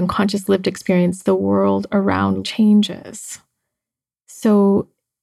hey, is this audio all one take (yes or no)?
no